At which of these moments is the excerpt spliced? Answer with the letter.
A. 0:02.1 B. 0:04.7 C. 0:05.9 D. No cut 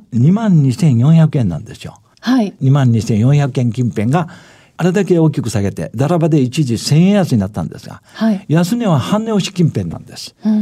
A